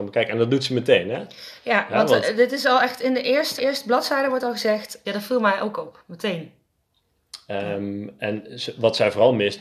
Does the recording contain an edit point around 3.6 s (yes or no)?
yes